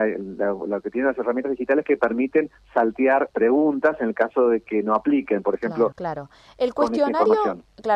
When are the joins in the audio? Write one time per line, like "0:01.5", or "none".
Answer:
0:03.3
0:05.9